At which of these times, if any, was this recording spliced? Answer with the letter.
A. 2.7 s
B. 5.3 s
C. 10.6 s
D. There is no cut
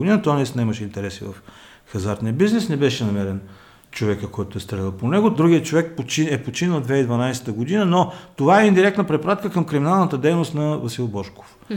B